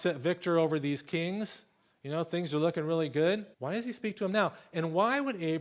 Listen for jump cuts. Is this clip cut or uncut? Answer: cut